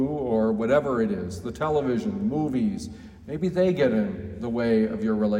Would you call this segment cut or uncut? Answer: uncut